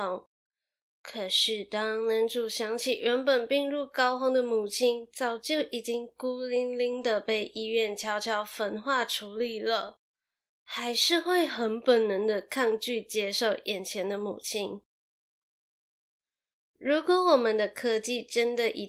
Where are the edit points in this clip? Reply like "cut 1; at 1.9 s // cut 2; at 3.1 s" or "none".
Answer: none

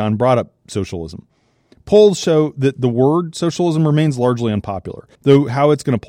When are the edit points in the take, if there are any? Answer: cut 1; at 5.1 s

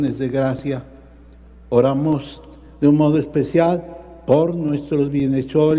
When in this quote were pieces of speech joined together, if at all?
none

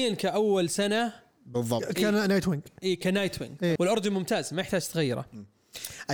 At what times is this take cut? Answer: cut 1; at 3.8 s

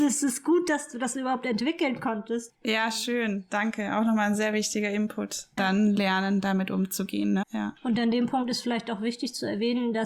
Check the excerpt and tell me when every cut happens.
cut 1; at 5.6 s // cut 2; at 7.4 s

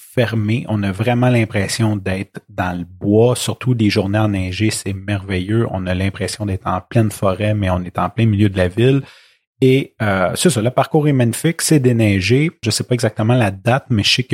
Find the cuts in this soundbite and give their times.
cut 1; at 12.6 s

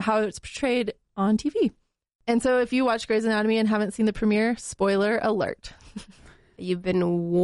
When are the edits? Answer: none

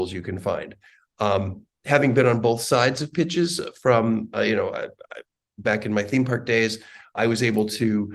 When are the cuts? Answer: cut 1; at 7.2 s

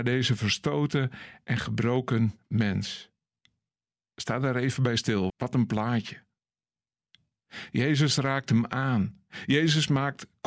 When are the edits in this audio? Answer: cut 1; at 5.3 s

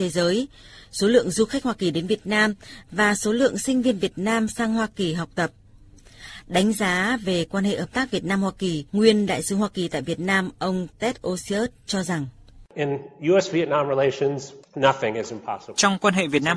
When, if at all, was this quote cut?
cut 1; at 8.9 s

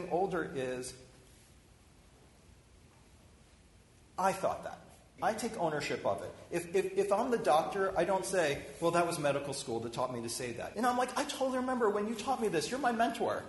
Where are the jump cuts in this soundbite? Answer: cut 1; at 5.2 s // cut 2; at 10.7 s

